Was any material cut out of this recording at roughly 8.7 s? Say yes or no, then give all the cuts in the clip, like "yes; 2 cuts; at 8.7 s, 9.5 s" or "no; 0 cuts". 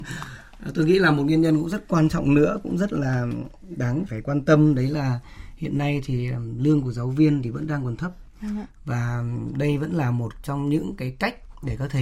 no; 1 cut; at 4.1 s